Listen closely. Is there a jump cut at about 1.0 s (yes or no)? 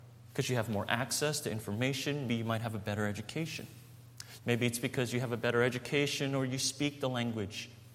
no